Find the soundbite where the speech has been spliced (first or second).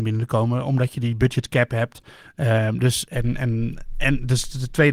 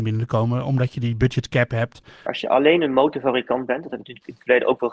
second